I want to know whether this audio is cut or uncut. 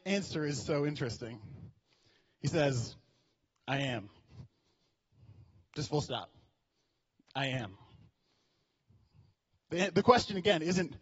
uncut